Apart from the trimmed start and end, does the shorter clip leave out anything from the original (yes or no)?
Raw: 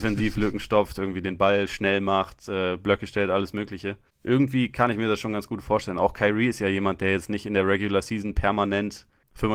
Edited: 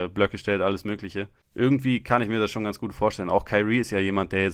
no